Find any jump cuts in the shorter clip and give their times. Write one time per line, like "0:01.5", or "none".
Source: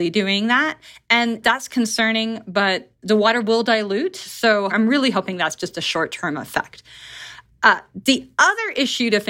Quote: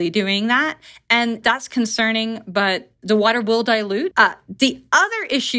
0:04.1